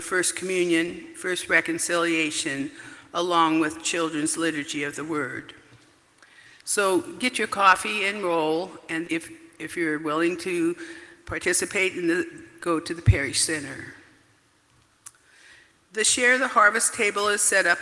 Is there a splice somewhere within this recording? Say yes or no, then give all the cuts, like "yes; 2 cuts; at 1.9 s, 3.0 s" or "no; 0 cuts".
yes; 2 cuts; at 9.0 s, 12.6 s